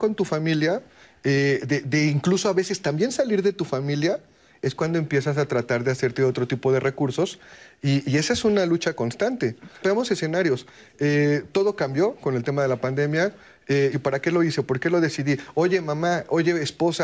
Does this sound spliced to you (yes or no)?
yes